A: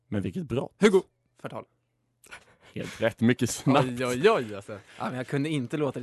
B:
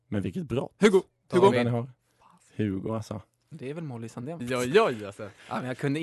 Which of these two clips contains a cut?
B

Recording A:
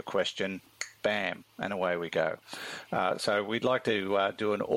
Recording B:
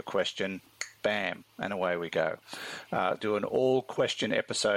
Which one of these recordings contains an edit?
B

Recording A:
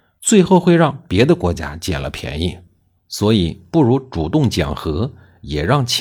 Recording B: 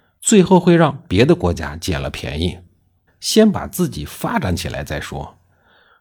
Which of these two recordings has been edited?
B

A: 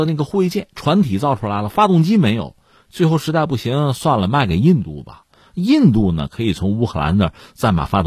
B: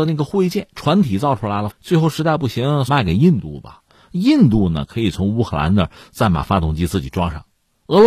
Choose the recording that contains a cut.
B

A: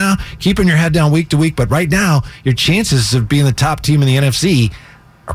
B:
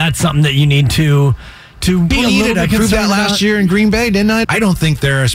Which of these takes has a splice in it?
B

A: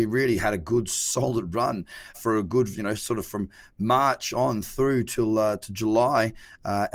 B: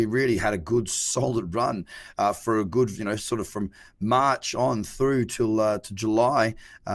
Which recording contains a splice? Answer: A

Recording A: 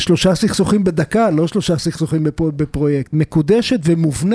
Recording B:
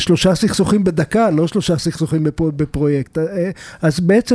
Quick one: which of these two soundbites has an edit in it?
A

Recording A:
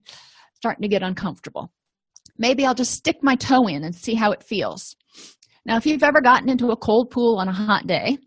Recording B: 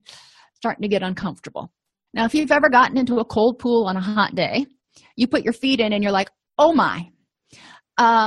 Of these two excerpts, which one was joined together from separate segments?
B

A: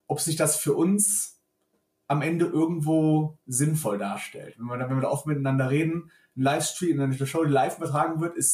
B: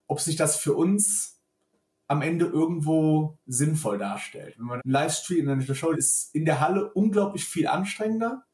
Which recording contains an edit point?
B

